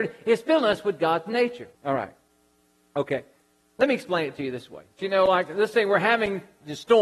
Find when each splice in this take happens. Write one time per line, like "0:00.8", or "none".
0:01.7
0:03.6
0:05.0